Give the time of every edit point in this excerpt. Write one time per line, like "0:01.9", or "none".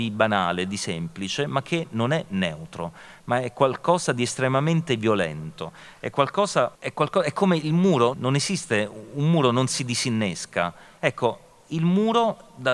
0:06.7
0:08.1
0:11.0